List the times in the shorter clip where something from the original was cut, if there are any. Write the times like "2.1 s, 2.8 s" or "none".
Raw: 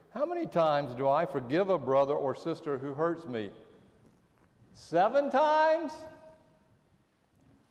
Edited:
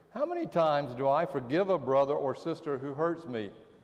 none